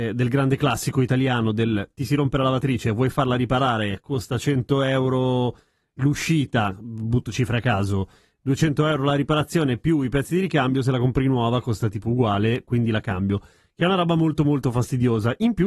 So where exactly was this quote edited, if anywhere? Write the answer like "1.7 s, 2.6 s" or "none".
none